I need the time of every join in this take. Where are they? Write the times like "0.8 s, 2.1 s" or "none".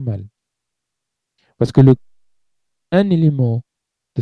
none